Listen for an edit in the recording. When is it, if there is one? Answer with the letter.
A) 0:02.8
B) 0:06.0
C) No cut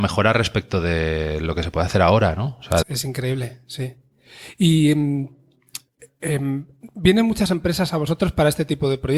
A